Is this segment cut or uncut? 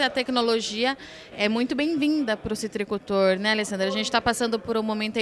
cut